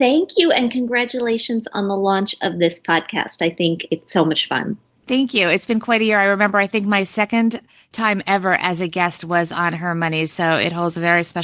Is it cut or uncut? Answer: uncut